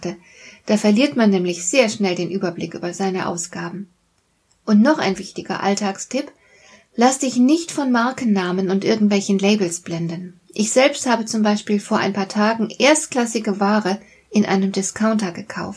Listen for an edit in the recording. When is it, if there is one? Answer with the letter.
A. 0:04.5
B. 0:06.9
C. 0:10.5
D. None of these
D